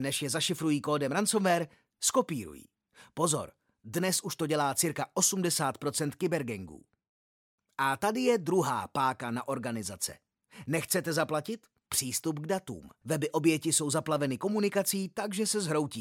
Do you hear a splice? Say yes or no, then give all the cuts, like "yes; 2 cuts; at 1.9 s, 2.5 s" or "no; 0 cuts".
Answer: yes; 2 cuts; at 11.9 s, 13.0 s